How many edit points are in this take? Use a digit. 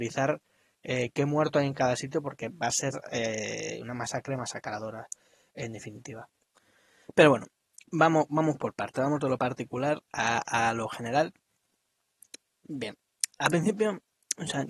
1